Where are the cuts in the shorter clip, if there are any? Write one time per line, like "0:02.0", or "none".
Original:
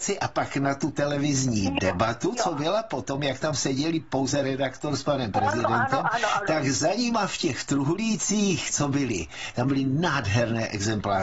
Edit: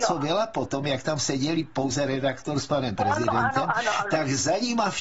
none